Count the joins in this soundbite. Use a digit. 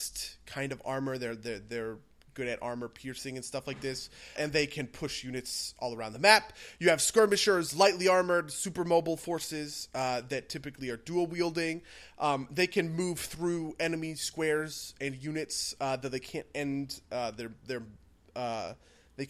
1